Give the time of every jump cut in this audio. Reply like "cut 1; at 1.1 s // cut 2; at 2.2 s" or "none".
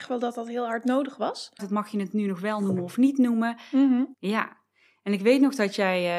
cut 1; at 1.6 s // cut 2; at 4.1 s